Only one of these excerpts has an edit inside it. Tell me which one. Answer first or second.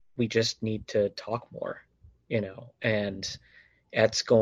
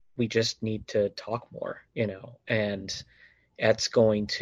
second